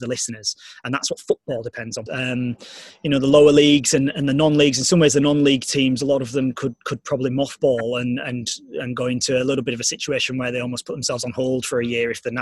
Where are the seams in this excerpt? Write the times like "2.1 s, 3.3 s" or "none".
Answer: 2.1 s